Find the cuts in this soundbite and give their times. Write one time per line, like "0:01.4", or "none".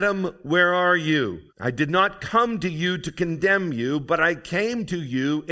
0:01.5

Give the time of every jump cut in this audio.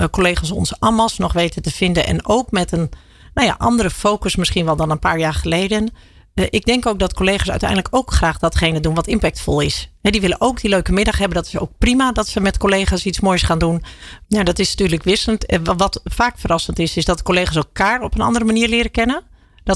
0:14.2

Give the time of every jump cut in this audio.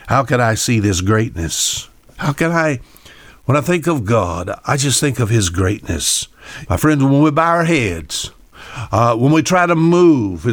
0:06.7

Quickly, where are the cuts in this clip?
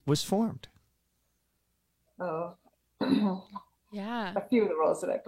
0:02.0

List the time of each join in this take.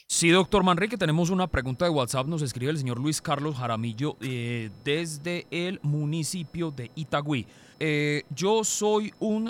0:07.7

